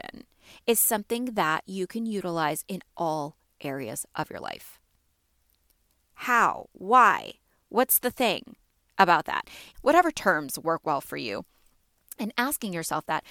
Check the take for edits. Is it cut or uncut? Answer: cut